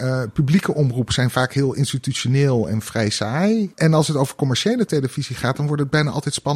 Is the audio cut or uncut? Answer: cut